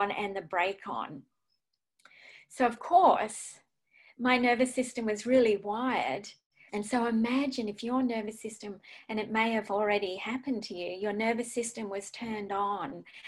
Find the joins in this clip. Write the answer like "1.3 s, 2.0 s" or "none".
6.7 s